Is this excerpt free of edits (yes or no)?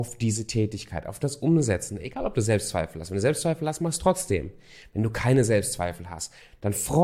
yes